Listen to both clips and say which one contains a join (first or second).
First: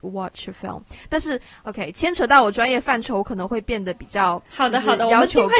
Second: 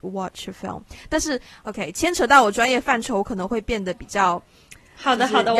first